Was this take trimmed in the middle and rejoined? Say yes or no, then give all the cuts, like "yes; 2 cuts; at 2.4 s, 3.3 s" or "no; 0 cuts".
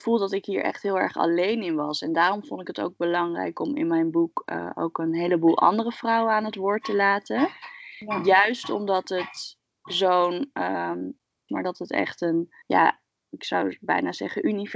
yes; 2 cuts; at 11.5 s, 12.6 s